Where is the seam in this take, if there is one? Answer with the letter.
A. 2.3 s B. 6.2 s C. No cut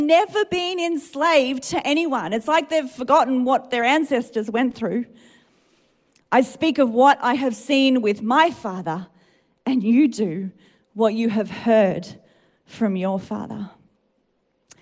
B